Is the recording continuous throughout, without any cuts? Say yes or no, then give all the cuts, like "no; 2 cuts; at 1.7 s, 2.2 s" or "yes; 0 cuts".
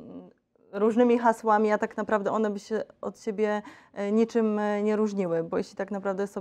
yes; 0 cuts